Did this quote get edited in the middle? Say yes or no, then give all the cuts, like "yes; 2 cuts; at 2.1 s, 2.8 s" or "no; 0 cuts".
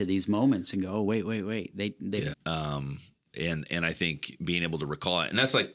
yes; 1 cut; at 2.3 s